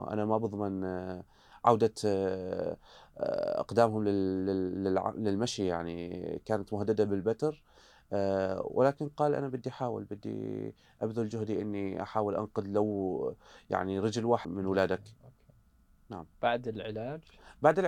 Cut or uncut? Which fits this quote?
cut